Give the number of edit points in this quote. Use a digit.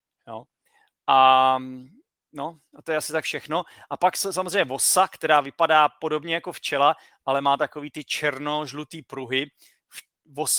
0